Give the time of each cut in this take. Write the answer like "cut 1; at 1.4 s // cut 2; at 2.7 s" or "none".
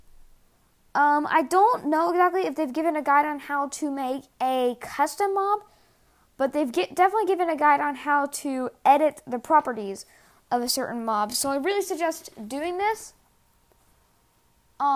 none